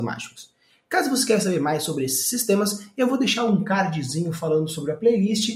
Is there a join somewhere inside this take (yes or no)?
no